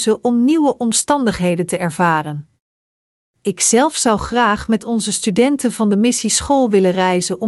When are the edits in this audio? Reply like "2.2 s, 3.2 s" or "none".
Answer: 3.2 s